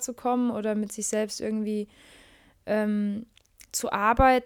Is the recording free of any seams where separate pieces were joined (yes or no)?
yes